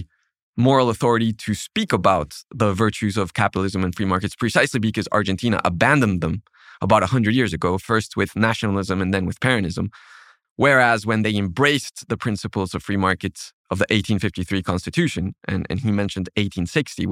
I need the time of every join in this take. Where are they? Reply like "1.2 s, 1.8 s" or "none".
10.4 s